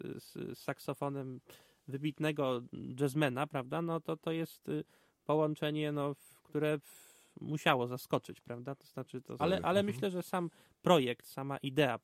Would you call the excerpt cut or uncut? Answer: cut